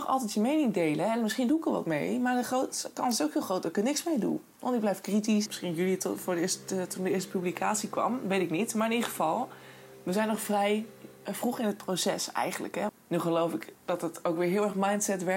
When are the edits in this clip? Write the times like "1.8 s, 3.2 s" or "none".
5.5 s, 12.9 s